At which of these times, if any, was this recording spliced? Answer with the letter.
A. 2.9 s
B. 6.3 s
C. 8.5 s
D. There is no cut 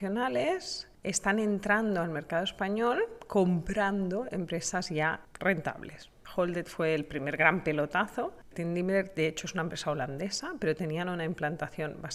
C